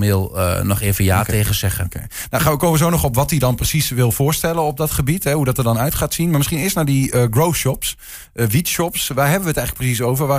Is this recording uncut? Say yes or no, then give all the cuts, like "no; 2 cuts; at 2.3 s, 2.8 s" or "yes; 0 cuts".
yes; 0 cuts